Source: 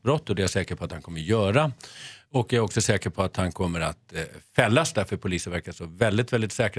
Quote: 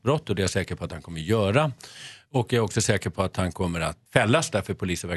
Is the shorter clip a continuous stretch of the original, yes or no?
no